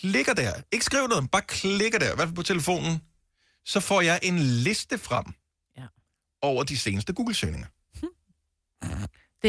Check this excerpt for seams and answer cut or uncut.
uncut